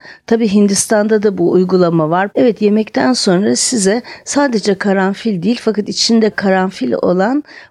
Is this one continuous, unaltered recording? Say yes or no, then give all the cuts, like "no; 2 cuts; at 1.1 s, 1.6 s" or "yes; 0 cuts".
no; 1 cut; at 2.3 s